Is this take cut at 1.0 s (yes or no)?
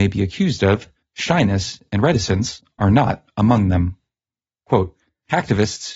no